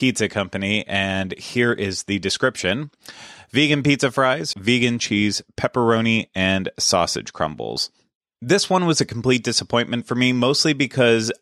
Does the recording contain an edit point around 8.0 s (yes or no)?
no